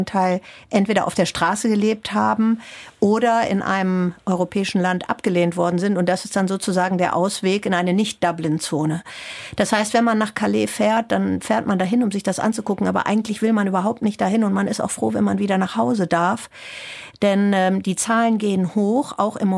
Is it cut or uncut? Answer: uncut